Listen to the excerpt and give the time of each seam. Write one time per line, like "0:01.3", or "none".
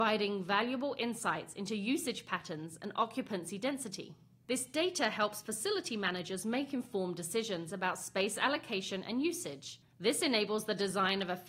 none